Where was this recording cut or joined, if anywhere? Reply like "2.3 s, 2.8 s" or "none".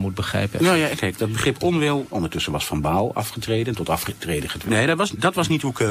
1.0 s, 2.1 s, 4.7 s

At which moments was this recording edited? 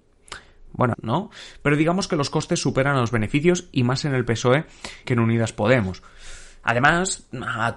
0.9 s, 5.0 s

